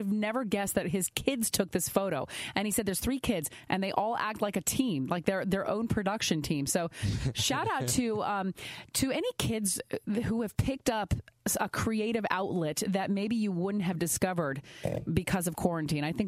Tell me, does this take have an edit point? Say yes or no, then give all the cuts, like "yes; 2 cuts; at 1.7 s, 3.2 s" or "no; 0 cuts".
no; 0 cuts